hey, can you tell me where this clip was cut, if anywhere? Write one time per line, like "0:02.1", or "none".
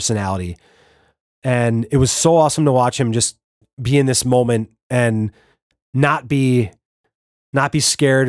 none